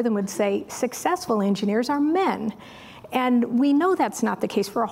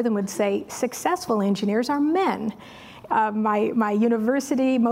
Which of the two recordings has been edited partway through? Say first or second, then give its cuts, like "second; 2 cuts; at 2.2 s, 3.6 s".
second; 1 cut; at 3.1 s